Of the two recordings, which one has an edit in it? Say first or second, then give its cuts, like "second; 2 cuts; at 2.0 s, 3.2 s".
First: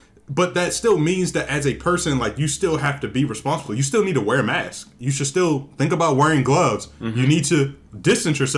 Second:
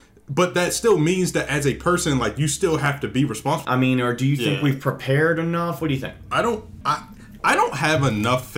second; 3 cuts; at 3.6 s, 5.8 s, 6.8 s